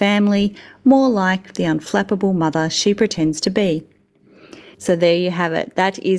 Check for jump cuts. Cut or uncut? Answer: cut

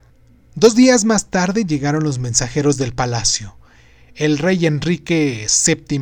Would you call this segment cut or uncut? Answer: uncut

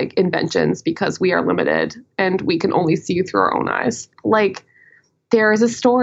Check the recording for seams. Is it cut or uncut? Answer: cut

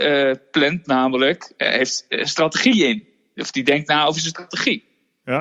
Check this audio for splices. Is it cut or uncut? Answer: uncut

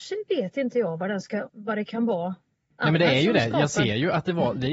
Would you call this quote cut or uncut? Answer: cut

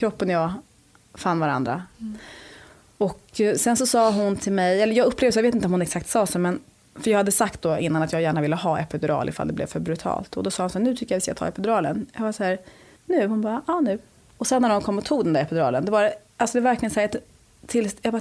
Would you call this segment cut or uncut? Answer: uncut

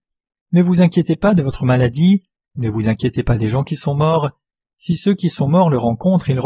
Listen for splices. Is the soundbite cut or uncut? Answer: cut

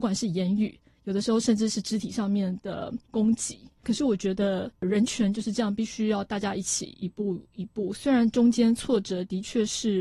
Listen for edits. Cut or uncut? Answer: uncut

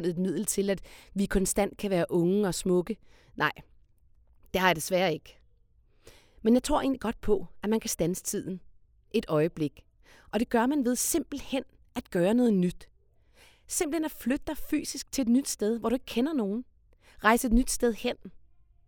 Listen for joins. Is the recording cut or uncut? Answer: uncut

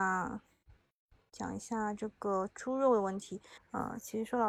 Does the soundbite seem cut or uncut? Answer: cut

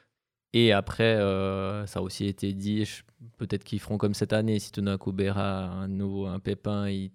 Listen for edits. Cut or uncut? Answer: uncut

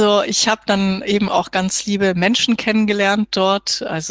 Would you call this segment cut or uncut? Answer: uncut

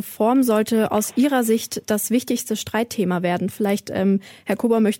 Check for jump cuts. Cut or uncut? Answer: uncut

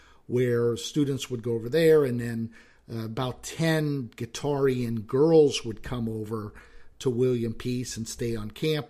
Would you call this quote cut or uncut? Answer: uncut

